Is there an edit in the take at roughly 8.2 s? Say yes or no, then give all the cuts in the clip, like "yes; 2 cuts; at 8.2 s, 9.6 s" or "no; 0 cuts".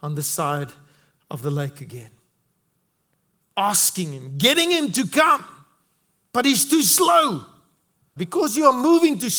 yes; 1 cut; at 8.2 s